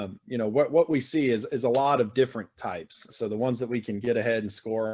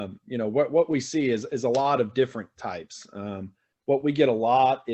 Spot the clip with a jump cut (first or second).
first